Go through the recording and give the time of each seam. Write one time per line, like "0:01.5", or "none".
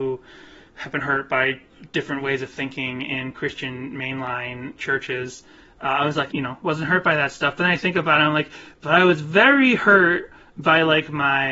0:06.3